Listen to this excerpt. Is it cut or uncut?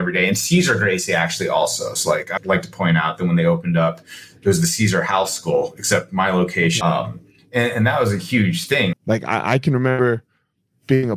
cut